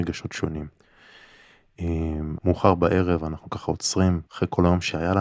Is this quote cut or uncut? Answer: cut